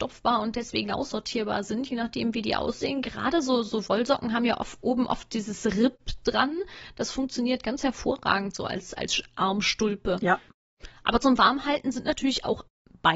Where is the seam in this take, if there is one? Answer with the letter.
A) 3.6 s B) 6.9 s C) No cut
C